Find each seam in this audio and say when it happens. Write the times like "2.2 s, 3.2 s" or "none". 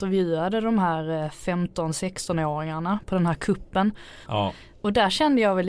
4.3 s